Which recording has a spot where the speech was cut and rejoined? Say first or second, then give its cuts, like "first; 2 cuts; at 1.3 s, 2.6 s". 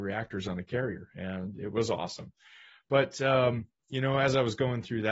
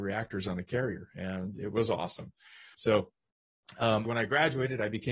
second; 2 cuts; at 2.7 s, 4.0 s